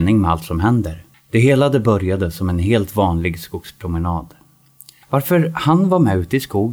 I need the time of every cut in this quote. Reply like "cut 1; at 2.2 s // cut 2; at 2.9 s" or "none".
cut 1; at 1.1 s // cut 2; at 5.0 s